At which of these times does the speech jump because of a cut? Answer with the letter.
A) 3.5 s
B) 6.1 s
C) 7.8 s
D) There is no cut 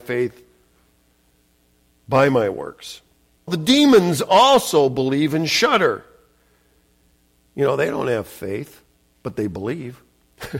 A